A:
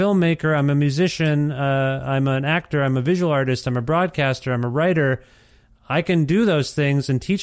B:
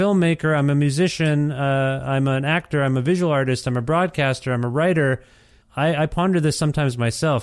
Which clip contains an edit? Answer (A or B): B